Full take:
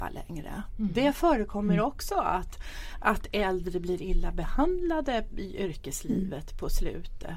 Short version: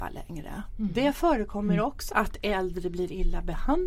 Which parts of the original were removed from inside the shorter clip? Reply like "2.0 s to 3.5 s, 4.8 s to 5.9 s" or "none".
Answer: 2.1 s to 3.0 s